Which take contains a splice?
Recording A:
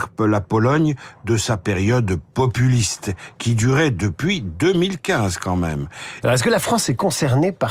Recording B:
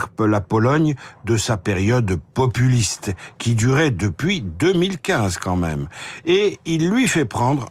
A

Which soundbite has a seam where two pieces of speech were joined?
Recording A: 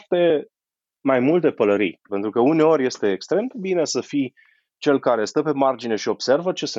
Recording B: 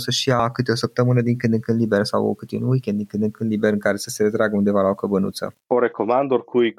A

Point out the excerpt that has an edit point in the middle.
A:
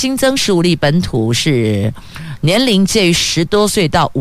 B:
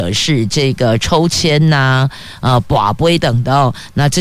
B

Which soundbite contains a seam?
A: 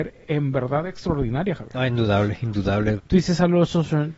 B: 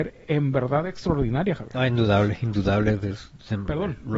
A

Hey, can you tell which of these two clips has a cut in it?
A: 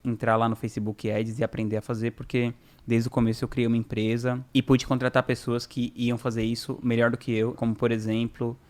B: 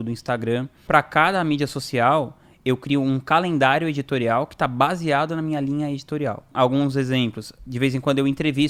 A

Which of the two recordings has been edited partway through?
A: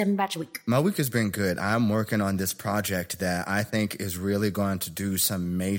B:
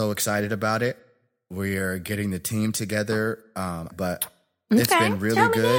B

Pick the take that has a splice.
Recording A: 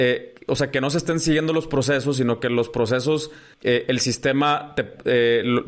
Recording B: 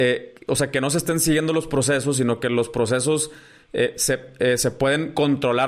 A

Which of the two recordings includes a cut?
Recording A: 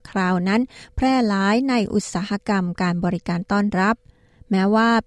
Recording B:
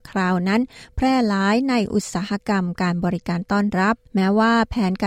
B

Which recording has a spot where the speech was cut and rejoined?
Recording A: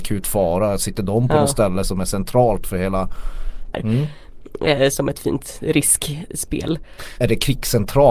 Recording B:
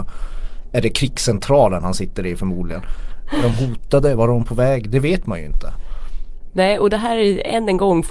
A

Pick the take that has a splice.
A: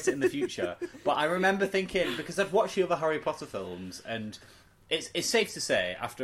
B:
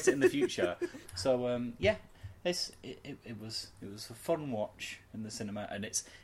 B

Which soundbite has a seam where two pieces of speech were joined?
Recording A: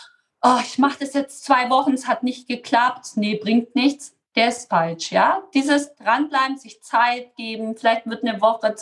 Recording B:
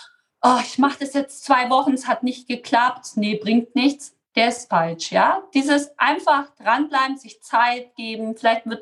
A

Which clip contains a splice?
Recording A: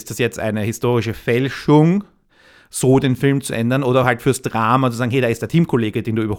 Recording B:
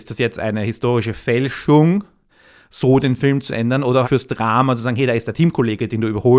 B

